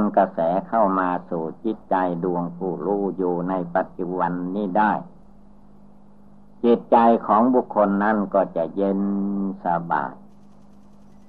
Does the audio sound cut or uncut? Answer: uncut